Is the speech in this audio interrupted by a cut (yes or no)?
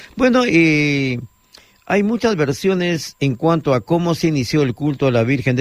no